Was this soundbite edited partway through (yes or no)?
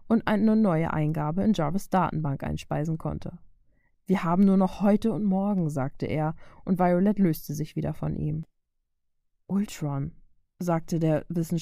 yes